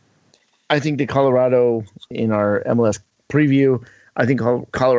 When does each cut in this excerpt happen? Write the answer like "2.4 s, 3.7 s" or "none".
2.1 s